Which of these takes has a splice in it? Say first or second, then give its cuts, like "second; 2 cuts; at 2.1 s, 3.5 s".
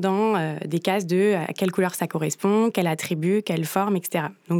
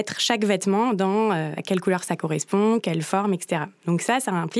second; 2 cuts; at 1.6 s, 2.8 s